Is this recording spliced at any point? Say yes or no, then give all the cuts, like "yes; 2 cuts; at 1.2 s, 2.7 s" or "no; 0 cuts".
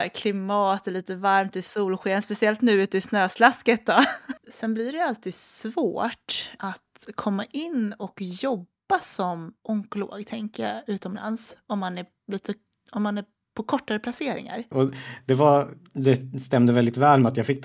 yes; 2 cuts; at 4.4 s, 14.7 s